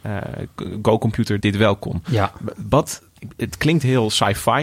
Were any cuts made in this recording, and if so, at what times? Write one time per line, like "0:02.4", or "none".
0:01.4